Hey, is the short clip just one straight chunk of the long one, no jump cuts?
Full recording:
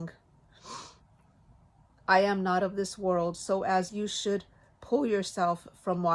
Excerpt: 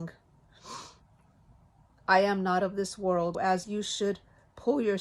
no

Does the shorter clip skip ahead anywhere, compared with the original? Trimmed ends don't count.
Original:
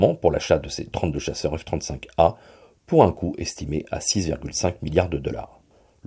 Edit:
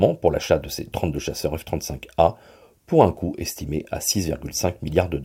no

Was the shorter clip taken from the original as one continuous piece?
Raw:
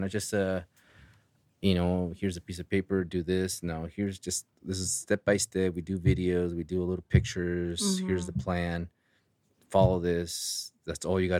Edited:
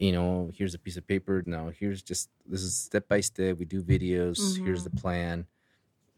no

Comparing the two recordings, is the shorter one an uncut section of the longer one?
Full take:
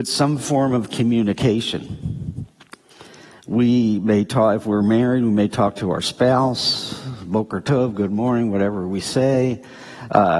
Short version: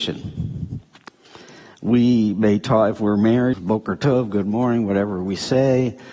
no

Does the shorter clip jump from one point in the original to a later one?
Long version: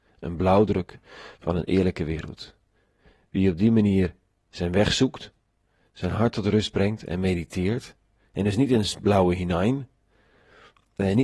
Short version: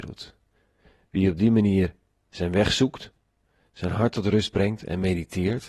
no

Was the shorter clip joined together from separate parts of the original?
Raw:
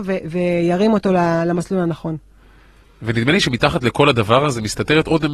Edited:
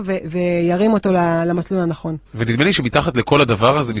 yes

